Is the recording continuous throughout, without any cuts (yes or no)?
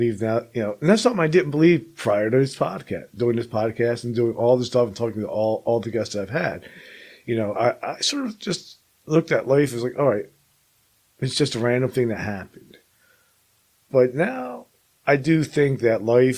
yes